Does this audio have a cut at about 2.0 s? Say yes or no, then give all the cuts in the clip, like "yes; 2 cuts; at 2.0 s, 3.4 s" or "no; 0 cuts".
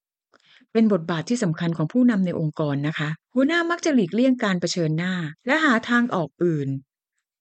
no; 2 cuts; at 3.2 s, 5.4 s